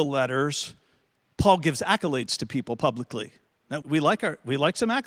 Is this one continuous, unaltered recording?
no; 1 cut; at 3.8 s

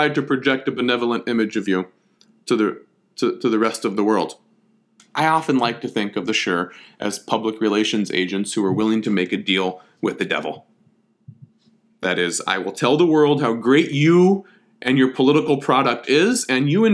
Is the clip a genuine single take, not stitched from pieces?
no; 1 cut; at 5.0 s

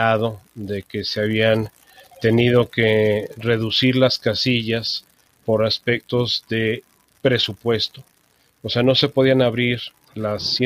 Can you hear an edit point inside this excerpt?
no; 0 cuts

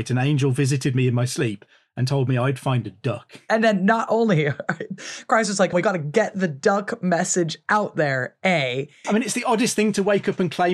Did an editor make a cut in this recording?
yes; 2 cuts; at 5.7 s, 9.0 s

